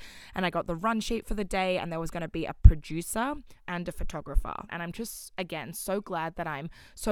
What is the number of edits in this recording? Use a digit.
2